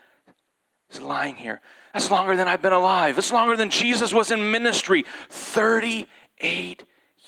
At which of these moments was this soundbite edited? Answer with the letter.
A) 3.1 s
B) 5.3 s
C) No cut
C